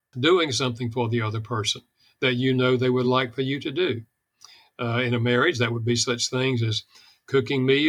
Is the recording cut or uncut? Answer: uncut